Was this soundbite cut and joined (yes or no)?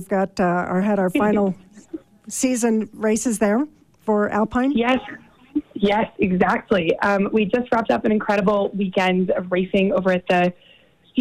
no